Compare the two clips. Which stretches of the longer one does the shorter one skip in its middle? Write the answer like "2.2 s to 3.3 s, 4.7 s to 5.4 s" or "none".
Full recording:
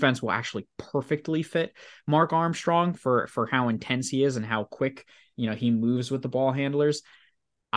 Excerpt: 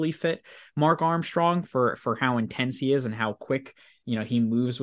none